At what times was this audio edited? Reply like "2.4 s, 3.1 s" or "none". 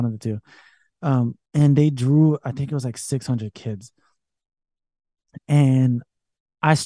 1.5 s